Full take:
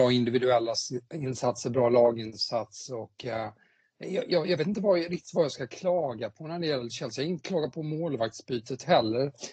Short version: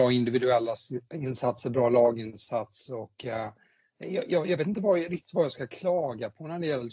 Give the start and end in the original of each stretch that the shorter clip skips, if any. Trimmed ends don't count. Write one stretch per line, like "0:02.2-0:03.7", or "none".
none